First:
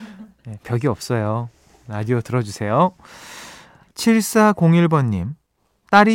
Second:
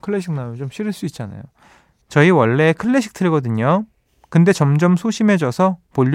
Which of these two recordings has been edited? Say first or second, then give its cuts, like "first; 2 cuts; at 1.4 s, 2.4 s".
second; 1 cut; at 2.0 s